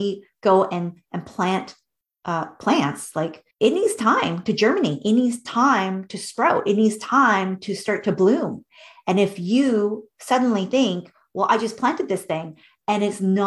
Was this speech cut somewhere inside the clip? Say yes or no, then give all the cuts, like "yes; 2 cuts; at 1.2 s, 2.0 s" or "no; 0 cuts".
yes; 1 cut; at 3.5 s